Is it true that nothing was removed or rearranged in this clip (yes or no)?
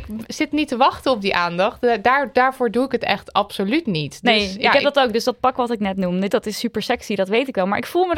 no